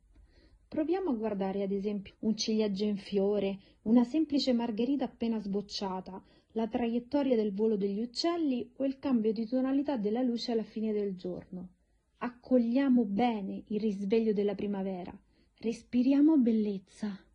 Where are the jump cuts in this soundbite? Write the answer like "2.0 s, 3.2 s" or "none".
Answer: 2.1 s